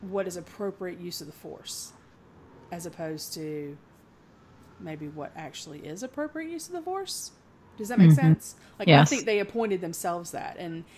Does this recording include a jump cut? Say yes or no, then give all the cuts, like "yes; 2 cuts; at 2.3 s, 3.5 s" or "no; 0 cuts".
no; 0 cuts